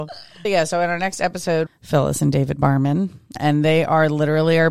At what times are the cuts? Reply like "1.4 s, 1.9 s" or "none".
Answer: 1.7 s